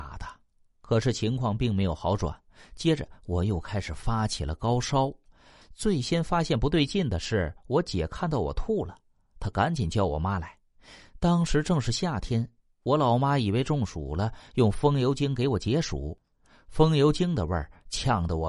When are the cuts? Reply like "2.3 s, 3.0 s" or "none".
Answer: 5.6 s